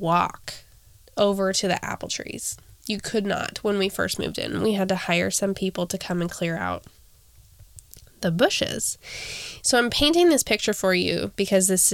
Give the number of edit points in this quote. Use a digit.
0